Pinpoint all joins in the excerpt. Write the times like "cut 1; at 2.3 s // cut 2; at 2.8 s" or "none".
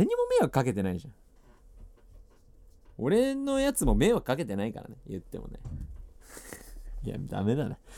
none